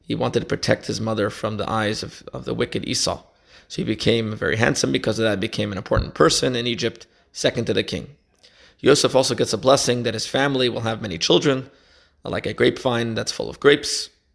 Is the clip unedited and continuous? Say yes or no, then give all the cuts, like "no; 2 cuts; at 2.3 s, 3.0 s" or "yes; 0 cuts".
yes; 0 cuts